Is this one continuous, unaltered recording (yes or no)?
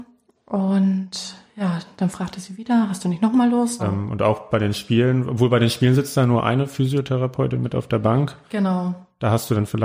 no